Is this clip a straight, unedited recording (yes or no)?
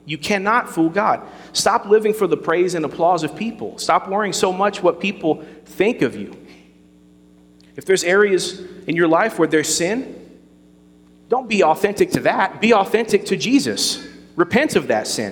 yes